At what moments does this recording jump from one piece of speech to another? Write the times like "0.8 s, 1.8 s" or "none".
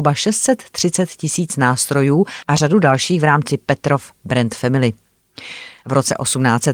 5.8 s